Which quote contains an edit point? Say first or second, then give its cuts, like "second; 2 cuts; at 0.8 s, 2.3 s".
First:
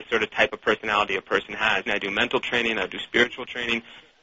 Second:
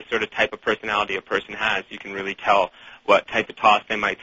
first; 1 cut; at 1.9 s